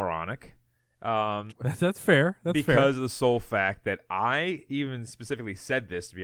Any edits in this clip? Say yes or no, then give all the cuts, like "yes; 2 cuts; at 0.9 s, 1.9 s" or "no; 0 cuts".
yes; 1 cut; at 1.5 s